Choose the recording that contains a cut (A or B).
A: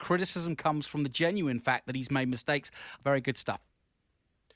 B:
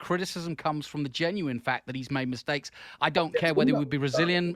A